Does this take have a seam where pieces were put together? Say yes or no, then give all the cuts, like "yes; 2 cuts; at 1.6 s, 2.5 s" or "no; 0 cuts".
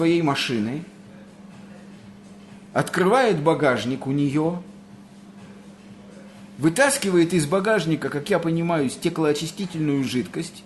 no; 0 cuts